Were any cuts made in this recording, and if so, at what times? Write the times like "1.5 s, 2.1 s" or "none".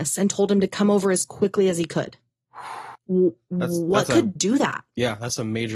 2.9 s, 4.4 s